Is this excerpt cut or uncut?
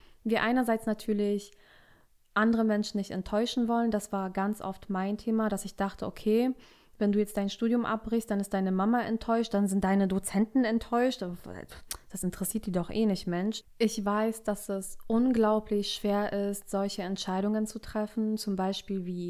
cut